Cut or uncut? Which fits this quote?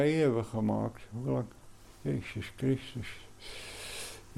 uncut